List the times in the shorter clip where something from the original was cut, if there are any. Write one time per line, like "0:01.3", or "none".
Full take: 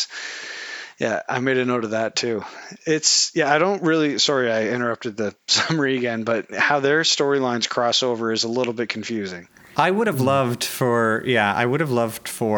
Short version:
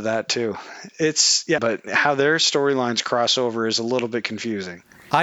0:01.6